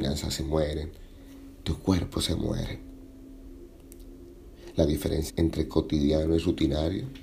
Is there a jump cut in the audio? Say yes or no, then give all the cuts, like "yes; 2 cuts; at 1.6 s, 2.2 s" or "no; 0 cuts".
yes; 1 cut; at 5.3 s